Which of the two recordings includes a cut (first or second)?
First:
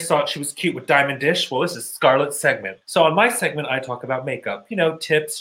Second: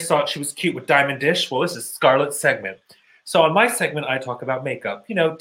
first